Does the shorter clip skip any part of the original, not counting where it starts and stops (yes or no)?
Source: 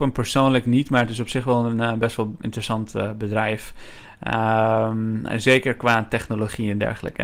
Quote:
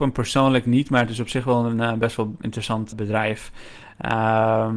yes